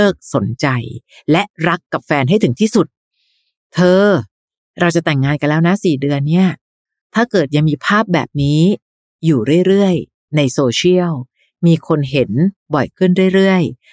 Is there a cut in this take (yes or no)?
no